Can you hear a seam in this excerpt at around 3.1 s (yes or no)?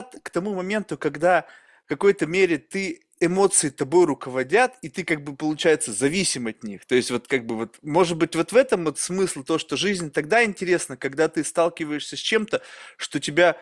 yes